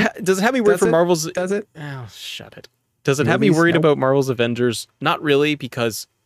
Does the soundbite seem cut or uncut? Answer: uncut